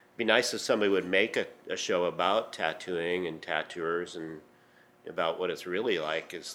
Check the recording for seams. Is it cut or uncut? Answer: uncut